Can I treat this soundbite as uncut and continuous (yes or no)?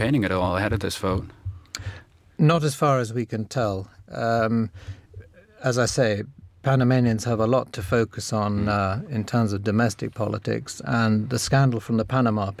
yes